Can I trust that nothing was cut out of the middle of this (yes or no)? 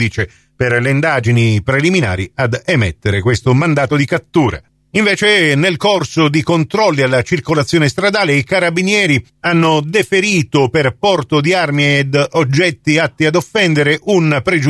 yes